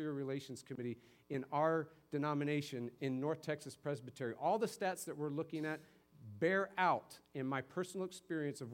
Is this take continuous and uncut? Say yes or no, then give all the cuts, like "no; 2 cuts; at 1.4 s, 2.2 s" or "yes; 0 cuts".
yes; 0 cuts